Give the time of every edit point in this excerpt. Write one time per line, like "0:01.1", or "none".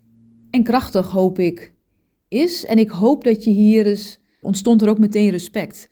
0:04.4